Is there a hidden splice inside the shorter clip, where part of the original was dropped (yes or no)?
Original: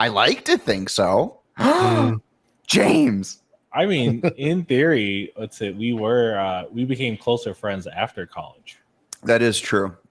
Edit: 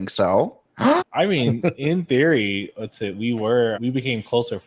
yes